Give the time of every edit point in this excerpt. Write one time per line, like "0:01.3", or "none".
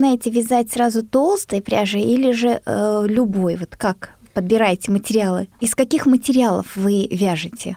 0:05.6